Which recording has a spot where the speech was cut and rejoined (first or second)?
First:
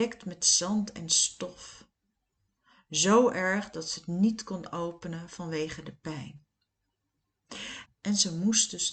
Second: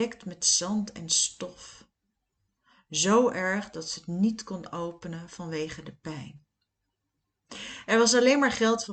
first